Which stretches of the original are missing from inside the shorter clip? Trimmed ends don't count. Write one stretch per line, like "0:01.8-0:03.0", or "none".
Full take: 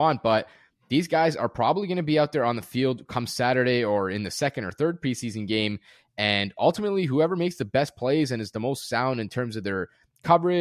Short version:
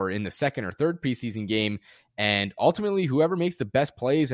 none